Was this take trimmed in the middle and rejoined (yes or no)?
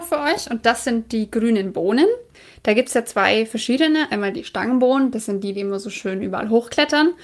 no